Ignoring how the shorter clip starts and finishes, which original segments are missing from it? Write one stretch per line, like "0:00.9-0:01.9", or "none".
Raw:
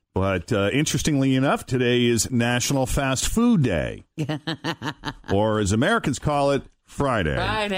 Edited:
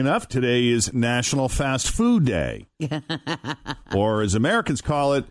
none